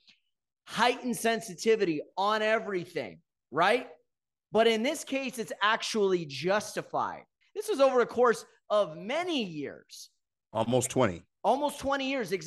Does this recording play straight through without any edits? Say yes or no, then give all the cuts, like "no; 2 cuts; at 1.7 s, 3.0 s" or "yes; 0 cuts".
no; 1 cut; at 7.4 s